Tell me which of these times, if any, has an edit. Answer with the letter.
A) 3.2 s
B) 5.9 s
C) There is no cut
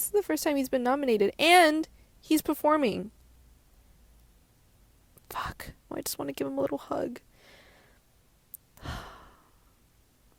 B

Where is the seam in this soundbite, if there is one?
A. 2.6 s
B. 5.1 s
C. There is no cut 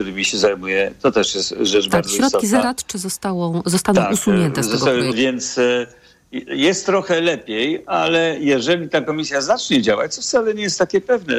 B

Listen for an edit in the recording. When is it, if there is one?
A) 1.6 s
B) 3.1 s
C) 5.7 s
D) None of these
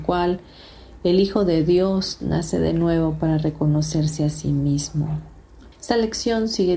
C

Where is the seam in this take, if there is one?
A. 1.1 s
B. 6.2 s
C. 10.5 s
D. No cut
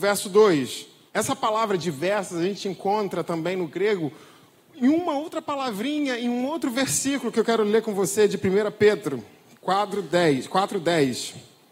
A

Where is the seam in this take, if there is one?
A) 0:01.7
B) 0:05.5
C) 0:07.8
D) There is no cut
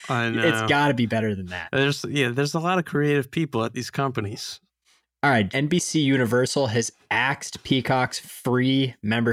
B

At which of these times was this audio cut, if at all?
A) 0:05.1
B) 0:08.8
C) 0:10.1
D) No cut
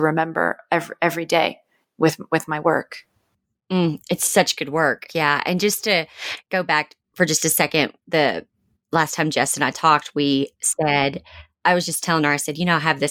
A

